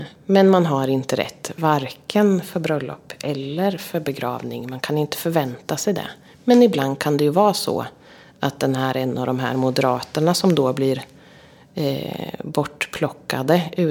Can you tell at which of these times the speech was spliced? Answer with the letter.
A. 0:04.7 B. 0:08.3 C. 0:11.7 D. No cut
D